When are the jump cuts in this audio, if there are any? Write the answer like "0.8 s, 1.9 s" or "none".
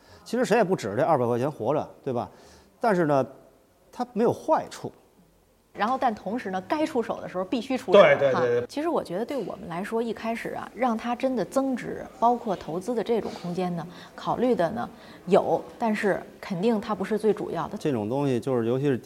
5.7 s